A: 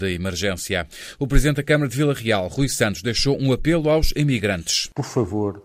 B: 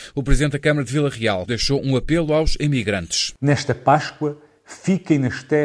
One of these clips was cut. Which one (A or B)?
B